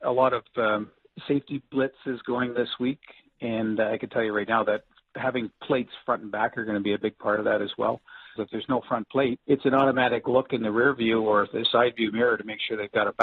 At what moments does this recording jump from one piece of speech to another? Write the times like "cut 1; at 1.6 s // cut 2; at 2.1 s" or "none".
cut 1; at 8.4 s // cut 2; at 9.4 s